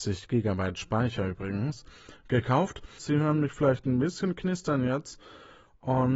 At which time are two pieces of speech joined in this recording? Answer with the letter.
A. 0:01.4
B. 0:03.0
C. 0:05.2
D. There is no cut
B